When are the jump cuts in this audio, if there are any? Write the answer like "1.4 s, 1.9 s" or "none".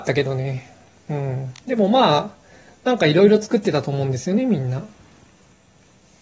none